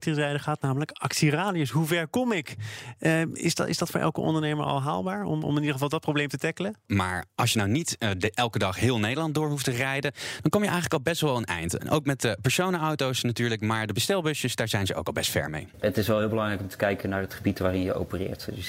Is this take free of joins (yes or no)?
no